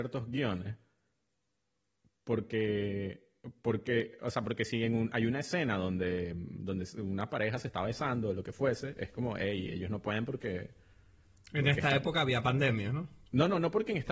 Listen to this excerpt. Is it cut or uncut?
uncut